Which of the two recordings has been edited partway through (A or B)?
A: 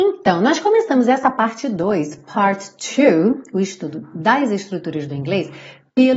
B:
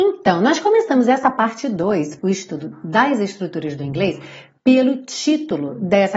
B